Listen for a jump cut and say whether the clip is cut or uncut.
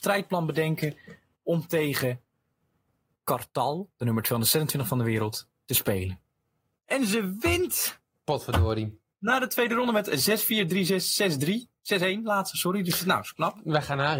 uncut